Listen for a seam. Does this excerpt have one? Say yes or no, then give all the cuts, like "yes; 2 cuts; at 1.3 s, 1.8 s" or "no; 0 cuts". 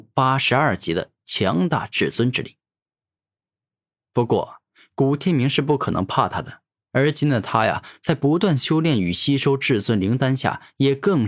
no; 0 cuts